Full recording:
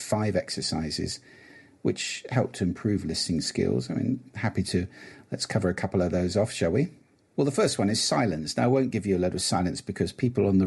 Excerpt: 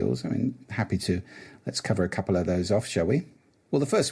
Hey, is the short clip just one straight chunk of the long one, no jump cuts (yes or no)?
yes